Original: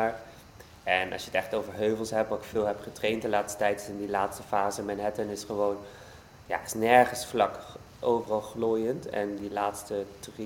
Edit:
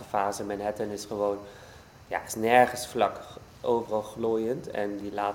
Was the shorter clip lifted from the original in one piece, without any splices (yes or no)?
yes